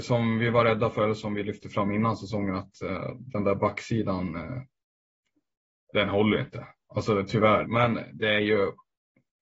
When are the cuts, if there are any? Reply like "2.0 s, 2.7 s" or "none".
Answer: 7.7 s